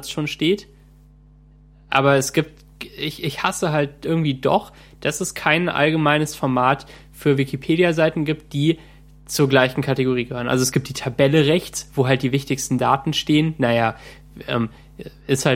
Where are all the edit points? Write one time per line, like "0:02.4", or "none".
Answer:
none

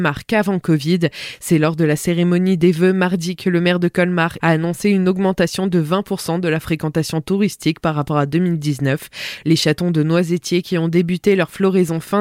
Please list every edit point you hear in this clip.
0:04.4
0:09.4

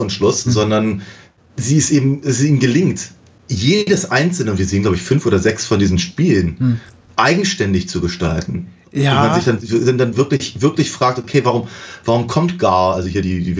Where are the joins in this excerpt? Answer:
0:09.6

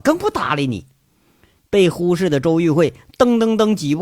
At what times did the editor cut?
0:01.6

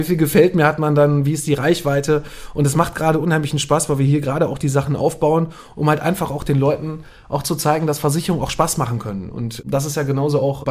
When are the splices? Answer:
none

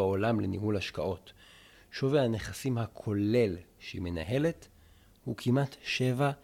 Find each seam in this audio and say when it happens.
none

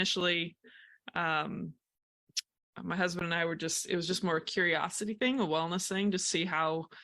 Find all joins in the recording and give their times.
none

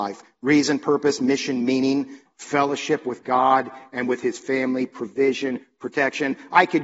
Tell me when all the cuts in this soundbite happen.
0:02.3

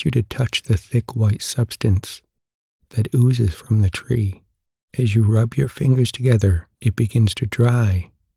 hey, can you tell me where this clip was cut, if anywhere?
0:04.9
0:06.7

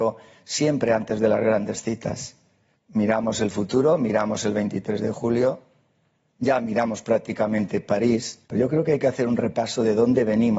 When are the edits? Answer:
0:02.7
0:08.4

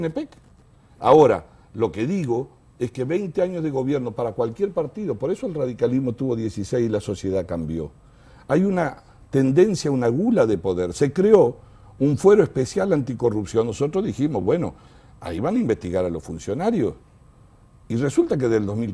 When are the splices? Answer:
none

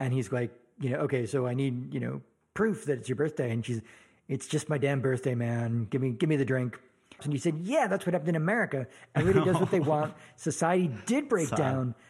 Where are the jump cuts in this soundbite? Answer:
0:07.2

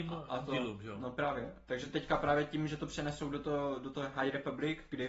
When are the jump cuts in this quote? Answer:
none

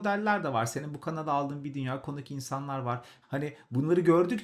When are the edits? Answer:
0:03.2

